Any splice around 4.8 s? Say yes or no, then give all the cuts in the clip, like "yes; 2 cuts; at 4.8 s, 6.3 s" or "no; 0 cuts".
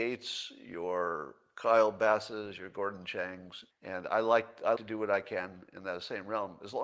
yes; 2 cuts; at 3.7 s, 4.8 s